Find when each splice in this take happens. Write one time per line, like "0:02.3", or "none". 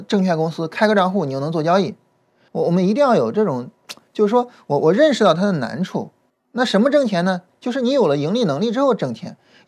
0:02.5
0:06.3